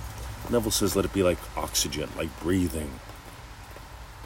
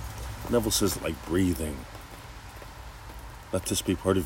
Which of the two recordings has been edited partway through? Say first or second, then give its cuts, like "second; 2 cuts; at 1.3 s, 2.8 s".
second; 1 cut; at 0.9 s